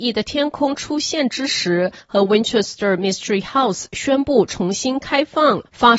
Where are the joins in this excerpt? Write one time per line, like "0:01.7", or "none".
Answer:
none